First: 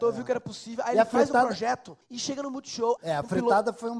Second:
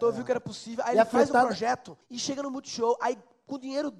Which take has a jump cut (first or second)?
first